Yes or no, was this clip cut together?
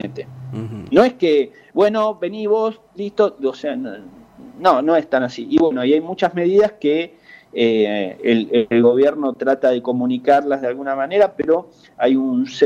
no